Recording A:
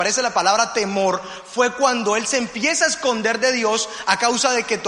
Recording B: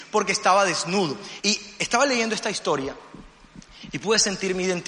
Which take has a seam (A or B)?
B